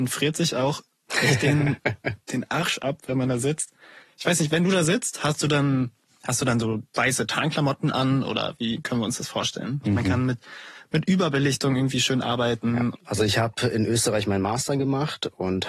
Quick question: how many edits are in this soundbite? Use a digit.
2